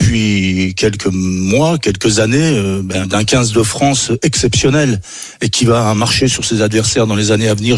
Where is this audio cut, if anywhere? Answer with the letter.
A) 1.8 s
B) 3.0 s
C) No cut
B